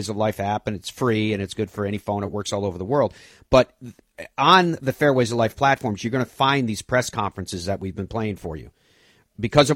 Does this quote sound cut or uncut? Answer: uncut